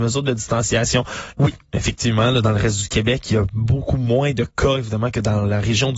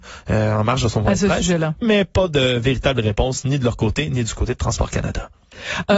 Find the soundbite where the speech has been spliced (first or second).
first